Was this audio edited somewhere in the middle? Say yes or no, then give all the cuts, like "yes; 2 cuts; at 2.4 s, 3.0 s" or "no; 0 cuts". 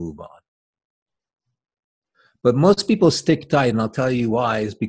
no; 0 cuts